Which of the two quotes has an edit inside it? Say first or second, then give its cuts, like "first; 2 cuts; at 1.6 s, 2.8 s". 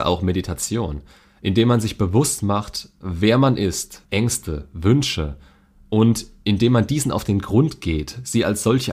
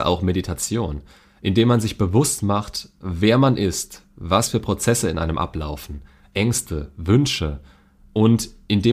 first; 1 cut; at 4.1 s